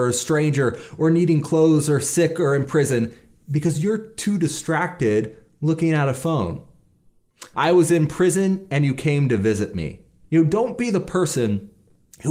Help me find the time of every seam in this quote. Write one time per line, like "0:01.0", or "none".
0:07.5
0:10.2

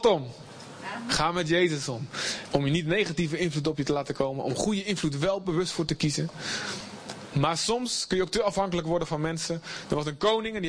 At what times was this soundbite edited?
0:02.5

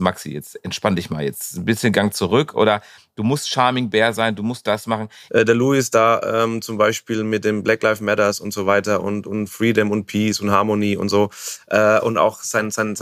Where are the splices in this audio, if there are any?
0:05.3

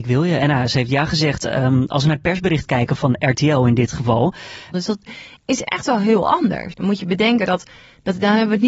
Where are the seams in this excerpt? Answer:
0:04.7
0:06.7

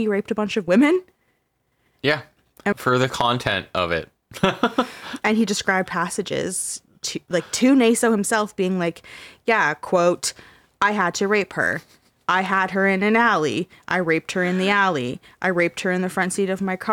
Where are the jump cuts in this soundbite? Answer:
0:02.7

